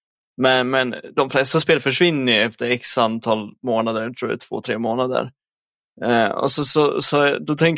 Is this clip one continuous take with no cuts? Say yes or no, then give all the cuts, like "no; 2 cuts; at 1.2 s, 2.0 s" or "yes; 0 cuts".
yes; 0 cuts